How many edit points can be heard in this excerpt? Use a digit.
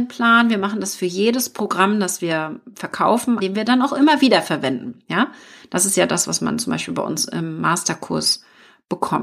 1